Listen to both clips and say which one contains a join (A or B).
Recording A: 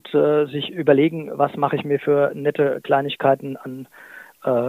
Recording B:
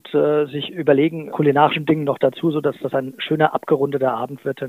B